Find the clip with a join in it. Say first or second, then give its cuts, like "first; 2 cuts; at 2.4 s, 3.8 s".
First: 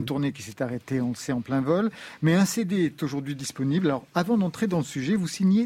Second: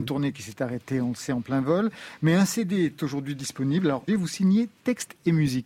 second; 1 cut; at 4.1 s